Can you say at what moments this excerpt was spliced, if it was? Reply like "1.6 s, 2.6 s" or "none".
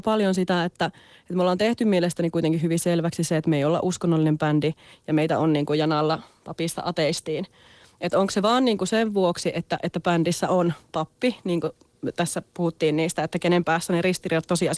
none